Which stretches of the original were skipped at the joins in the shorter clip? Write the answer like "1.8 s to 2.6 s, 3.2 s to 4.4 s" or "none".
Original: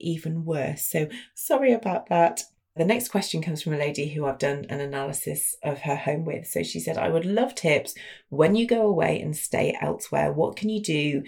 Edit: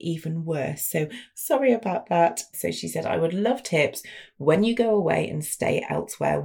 2.5 s to 6.4 s